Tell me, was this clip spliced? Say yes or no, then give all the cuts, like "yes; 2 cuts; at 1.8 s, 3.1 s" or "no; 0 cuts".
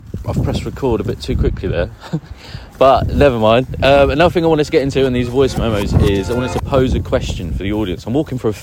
no; 0 cuts